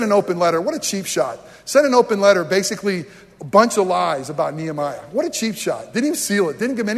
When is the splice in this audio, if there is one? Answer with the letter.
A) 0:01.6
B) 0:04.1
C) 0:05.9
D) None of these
D